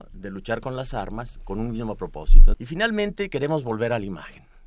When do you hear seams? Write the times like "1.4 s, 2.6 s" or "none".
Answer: 2.5 s